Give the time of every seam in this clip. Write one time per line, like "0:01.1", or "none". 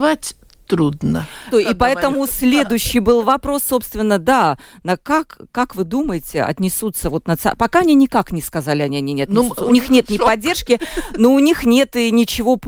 0:01.5